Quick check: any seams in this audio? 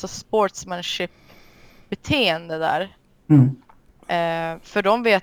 no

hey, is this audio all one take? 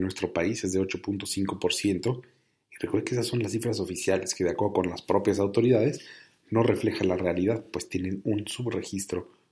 yes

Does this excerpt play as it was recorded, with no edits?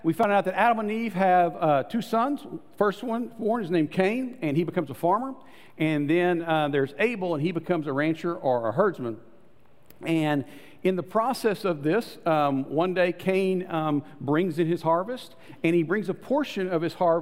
yes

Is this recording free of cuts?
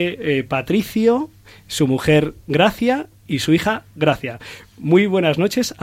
yes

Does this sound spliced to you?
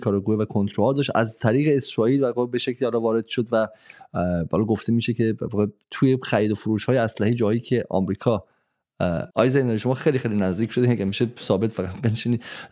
yes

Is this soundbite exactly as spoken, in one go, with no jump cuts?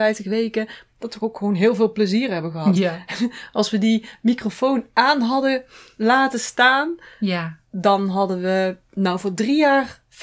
yes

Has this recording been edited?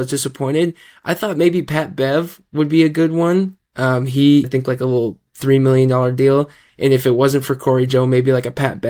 yes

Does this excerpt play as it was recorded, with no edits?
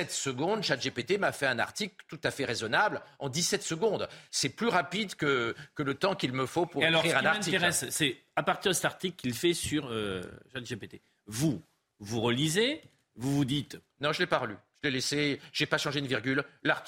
yes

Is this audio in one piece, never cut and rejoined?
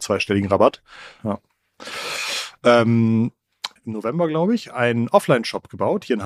no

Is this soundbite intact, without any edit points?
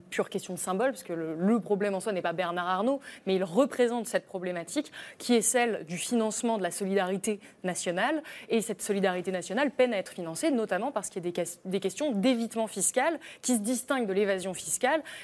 yes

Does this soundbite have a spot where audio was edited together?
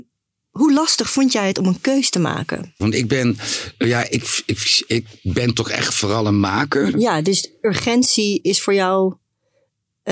yes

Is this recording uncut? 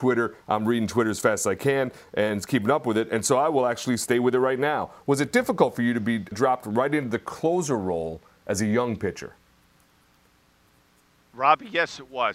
no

